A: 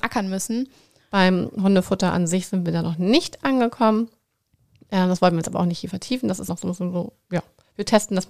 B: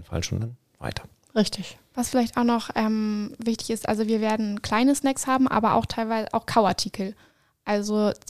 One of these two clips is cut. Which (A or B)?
A